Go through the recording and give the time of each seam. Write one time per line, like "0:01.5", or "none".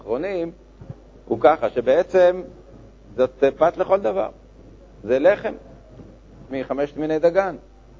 0:03.1
0:06.5